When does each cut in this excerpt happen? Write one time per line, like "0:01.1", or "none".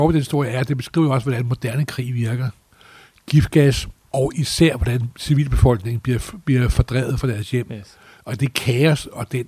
0:04.0

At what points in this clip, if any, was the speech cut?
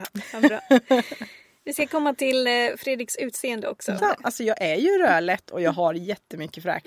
0:04.0

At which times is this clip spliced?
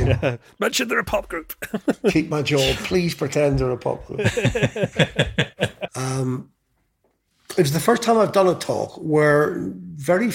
0:05.9

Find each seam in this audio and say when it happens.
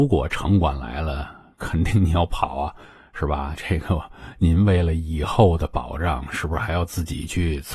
0:03.5

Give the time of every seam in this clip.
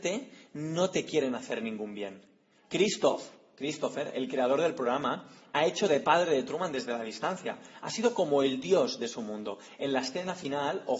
0:09.8

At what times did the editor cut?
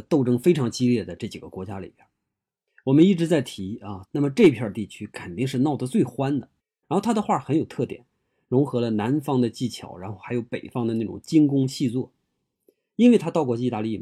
0:04.0
0:06.8

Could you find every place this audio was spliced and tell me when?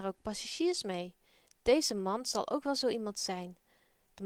none

